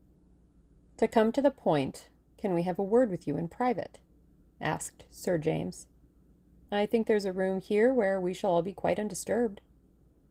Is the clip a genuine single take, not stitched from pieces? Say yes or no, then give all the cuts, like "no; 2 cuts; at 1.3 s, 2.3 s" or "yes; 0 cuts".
no; 1 cut; at 6.7 s